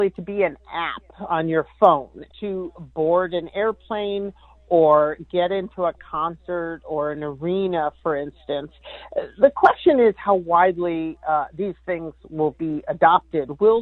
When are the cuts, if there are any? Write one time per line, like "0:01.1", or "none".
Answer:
0:02.3